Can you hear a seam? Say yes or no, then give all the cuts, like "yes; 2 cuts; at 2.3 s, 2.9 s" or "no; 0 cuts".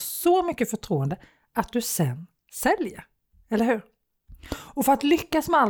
no; 0 cuts